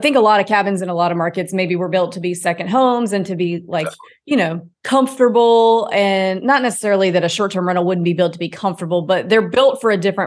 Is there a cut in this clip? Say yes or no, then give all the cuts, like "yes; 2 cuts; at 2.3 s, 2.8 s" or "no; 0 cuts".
yes; 1 cut; at 4.7 s